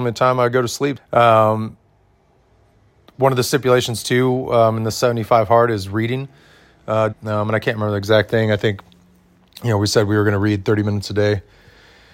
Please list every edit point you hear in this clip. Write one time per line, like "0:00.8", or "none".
0:01.0
0:07.1

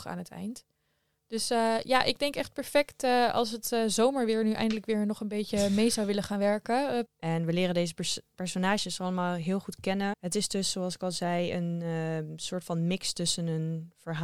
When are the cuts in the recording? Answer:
0:07.1
0:10.1

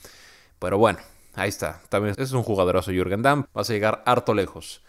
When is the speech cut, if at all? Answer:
0:02.1
0:03.5

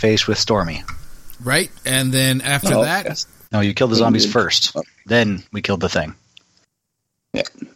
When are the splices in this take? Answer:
0:03.5

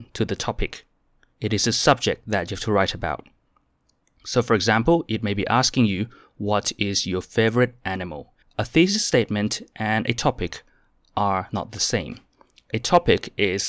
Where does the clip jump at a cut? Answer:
0:01.3
0:08.4

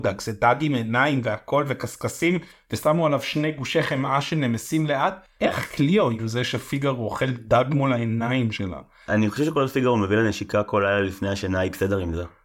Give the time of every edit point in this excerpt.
none

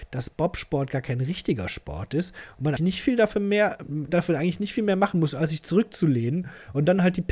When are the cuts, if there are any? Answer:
0:02.8

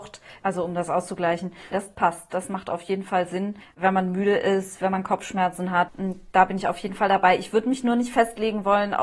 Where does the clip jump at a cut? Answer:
0:01.7
0:05.9

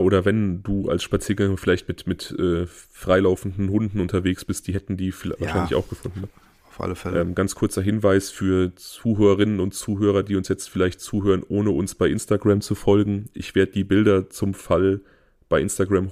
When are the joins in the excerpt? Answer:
none

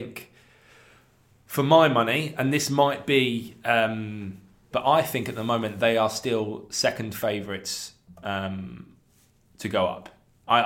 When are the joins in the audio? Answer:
0:04.7

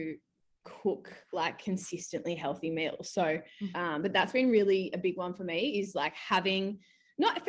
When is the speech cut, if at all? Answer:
0:03.7

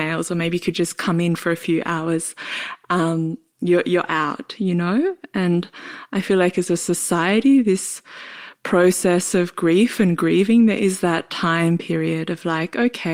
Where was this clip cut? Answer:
none

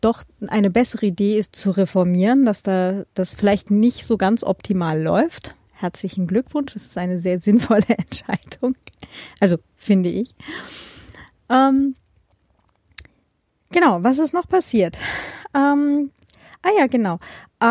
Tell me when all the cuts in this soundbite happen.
0:01.5

